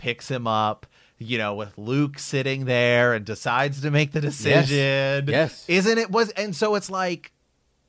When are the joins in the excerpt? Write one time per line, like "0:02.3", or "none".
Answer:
none